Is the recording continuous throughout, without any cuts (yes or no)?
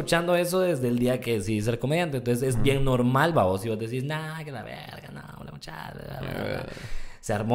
yes